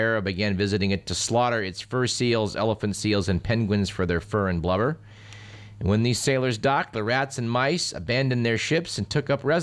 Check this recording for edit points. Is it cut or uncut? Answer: uncut